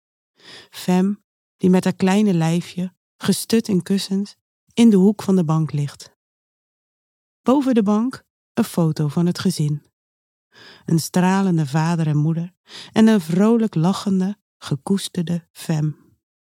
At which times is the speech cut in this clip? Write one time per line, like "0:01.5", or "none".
none